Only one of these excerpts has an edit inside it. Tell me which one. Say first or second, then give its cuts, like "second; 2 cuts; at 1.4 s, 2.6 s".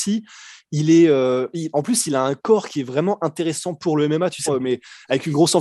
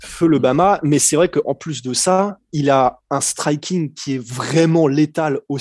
first; 1 cut; at 4.5 s